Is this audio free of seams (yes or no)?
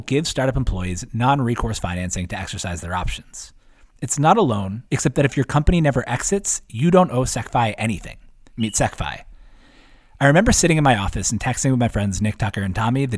no